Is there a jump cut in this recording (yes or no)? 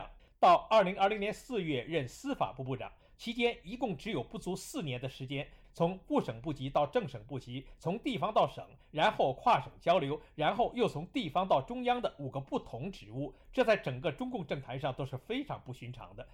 yes